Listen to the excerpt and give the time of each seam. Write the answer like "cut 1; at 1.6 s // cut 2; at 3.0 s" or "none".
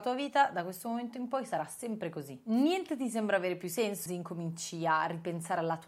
cut 1; at 4.1 s